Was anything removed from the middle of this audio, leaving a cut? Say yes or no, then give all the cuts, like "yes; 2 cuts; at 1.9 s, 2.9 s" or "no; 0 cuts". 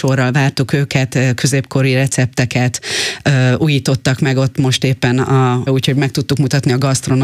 yes; 1 cut; at 5.7 s